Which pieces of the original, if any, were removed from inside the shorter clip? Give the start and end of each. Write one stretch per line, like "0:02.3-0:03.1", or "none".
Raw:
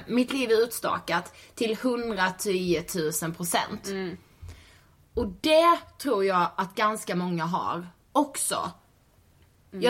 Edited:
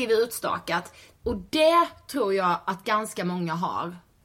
0:01.5-0:05.1